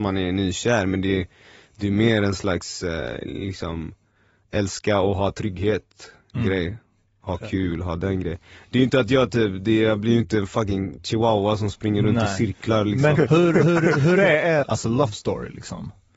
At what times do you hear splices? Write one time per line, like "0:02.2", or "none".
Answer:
0:13.2
0:14.6